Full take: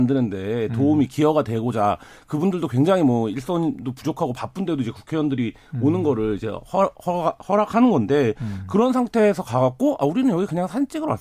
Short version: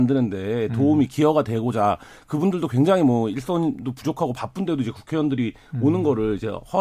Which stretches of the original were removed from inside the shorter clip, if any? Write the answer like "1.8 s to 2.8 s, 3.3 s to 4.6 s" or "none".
none

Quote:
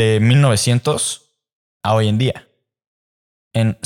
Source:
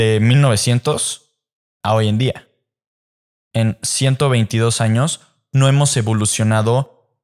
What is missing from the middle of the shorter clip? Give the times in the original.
none

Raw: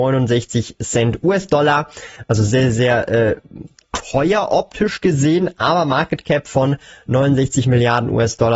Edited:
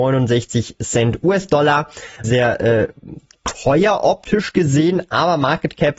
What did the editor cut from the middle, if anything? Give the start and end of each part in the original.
2.2 s to 2.7 s

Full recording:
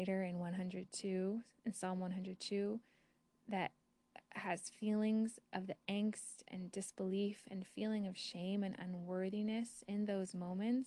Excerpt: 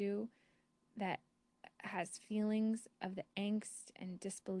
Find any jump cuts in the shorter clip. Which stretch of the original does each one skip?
none

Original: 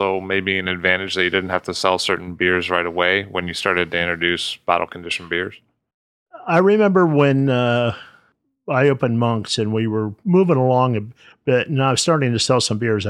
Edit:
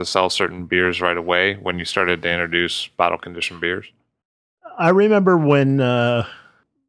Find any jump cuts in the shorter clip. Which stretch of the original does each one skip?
none

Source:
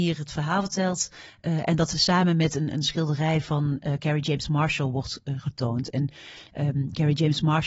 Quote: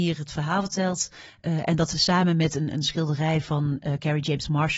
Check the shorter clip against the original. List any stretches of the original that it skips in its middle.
none

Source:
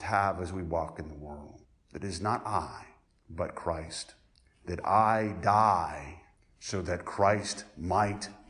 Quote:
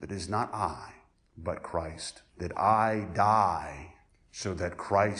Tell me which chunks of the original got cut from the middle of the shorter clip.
4.2 s to 4.6 s

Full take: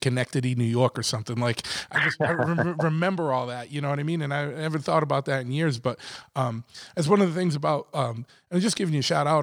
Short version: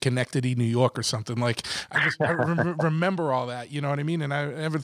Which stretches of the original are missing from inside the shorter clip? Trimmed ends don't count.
none

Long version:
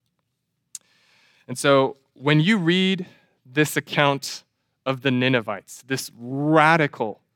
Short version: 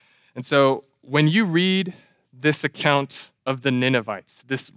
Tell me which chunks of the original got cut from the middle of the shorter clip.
4.5 s to 4.8 s

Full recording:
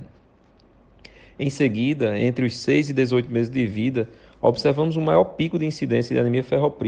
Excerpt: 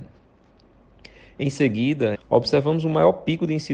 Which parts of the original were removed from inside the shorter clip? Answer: 2.1 s to 4.3 s

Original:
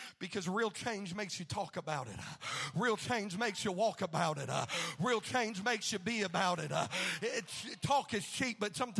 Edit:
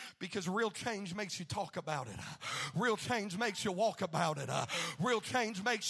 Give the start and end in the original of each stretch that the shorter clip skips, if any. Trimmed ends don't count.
none

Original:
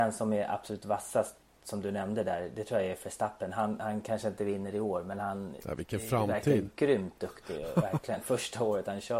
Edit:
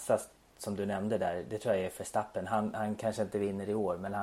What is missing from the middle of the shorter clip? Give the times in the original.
none

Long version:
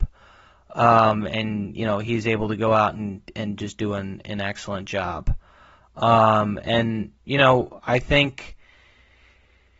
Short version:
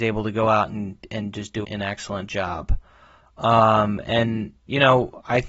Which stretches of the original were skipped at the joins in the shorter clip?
3.9 s to 4.2 s

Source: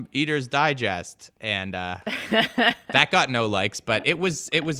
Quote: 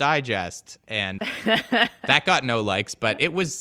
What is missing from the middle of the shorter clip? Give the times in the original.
1.7 s to 2.0 s

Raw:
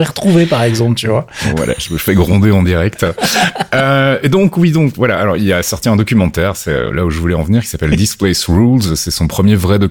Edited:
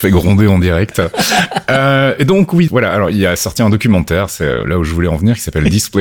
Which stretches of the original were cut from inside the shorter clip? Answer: 4.7 s to 4.9 s

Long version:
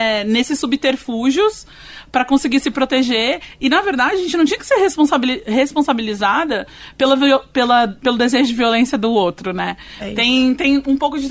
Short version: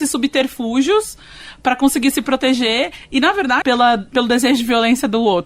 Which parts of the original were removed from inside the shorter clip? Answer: 4.1 s to 7.5 s

